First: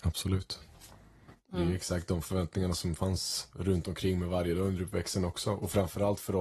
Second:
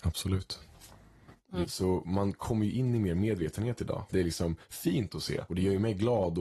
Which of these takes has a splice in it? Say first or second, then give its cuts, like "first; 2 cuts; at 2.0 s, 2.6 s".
second; 2 cuts; at 1.6 s, 4.1 s